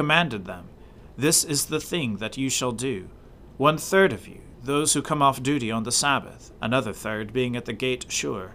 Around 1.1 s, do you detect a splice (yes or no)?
no